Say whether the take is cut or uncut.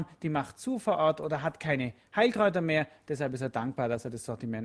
uncut